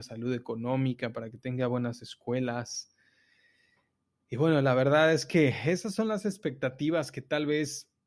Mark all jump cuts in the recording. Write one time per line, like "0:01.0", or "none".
none